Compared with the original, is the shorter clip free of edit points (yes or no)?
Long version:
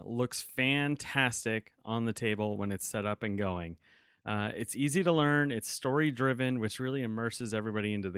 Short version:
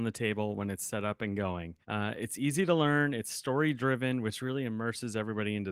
no